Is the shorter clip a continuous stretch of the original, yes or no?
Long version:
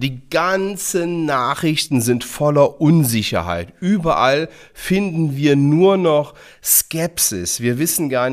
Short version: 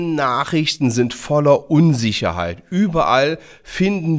yes